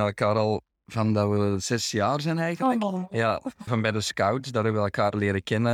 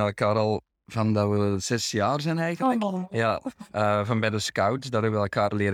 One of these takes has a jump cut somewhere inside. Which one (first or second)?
first